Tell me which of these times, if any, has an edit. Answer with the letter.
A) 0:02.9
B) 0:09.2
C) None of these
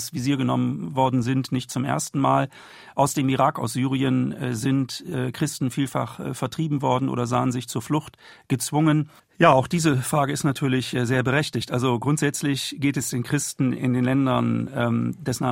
B